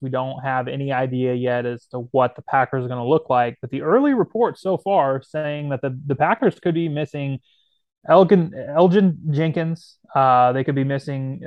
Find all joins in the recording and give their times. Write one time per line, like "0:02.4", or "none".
none